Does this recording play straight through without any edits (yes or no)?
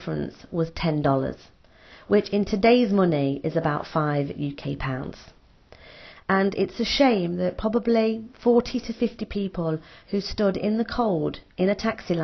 no